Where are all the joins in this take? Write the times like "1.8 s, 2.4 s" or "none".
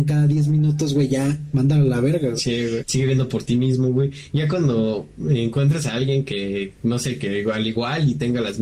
2.8 s